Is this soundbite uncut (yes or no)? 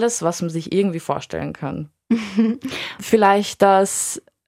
no